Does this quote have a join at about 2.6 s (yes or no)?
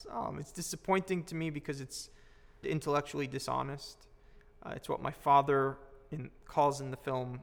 yes